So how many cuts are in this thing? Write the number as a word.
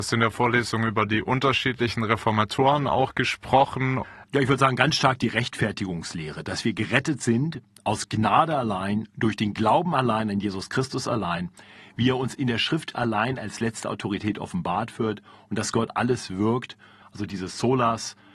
two